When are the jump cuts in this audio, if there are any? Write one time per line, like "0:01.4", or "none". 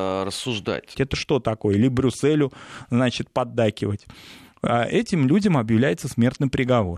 0:00.9